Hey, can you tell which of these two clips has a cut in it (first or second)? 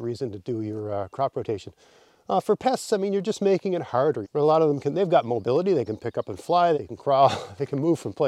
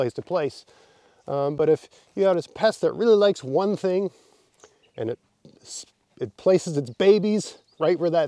first